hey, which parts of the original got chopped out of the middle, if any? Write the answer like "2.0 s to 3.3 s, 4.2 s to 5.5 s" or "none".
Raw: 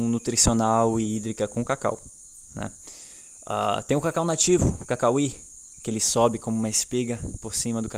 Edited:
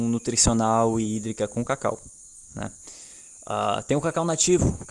none